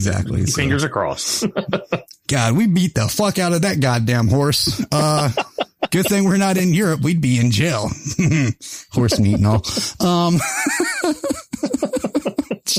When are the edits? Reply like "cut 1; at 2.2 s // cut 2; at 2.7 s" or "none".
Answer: none